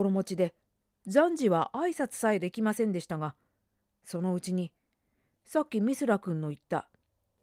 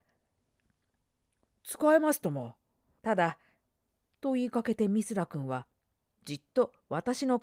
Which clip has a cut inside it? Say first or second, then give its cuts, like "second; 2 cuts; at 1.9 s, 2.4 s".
second; 1 cut; at 3.0 s